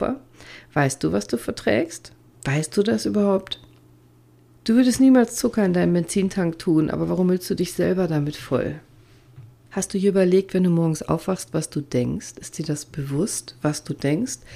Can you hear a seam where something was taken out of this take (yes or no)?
yes